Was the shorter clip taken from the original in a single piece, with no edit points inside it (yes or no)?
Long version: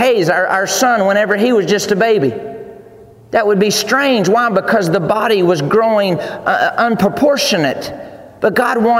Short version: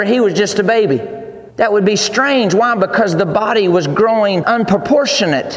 no